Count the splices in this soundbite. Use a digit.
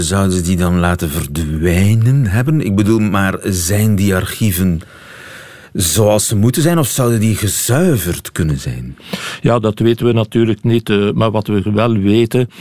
0